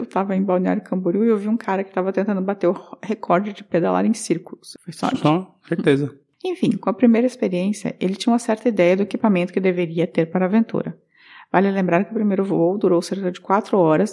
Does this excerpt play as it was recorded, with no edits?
no; 1 cut; at 4.8 s

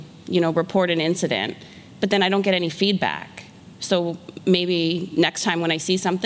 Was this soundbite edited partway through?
no; 0 cuts

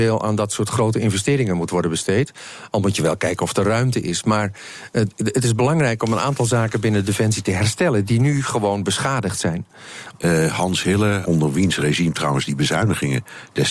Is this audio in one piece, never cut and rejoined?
no; 2 cuts; at 10.1 s, 11.3 s

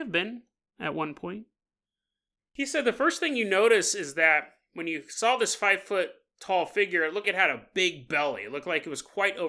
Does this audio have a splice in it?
yes; 1 cut; at 7.2 s

